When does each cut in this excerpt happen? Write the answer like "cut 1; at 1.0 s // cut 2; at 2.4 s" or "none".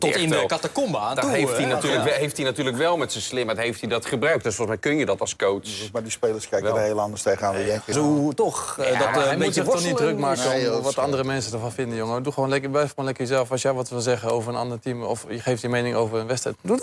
cut 1; at 7.9 s